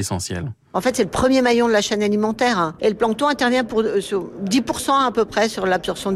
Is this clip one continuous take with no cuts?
yes; 0 cuts

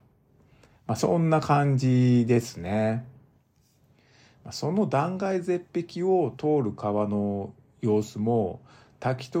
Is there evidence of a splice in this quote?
no; 0 cuts

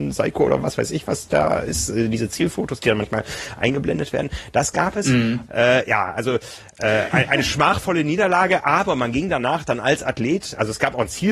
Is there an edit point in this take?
yes; 1 cut; at 5.5 s

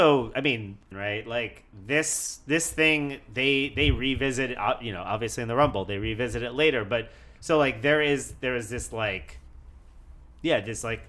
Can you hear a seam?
yes; 1 cut; at 0.9 s

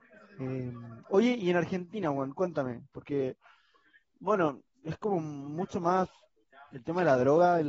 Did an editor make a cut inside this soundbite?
no; 0 cuts

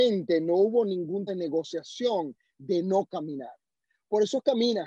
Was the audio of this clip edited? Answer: yes; 1 cut; at 1.3 s

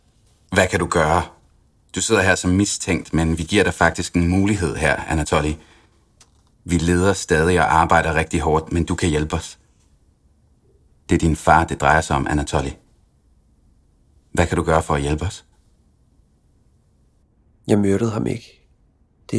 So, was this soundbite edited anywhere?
yes; 1 cut; at 6.5 s

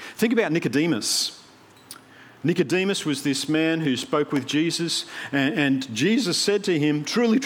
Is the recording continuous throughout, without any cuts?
yes; 0 cuts

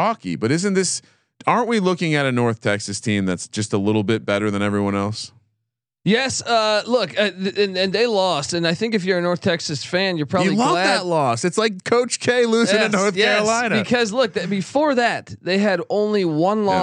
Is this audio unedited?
yes; 0 cuts

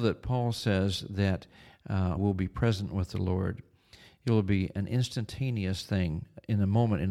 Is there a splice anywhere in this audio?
yes; 1 cut; at 2.2 s

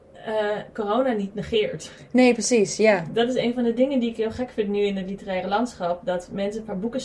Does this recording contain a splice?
no; 0 cuts

